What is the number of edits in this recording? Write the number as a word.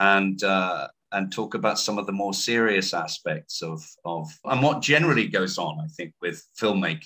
one